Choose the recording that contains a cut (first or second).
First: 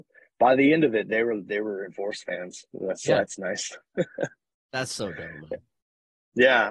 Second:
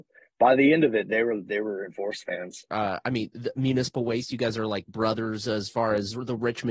second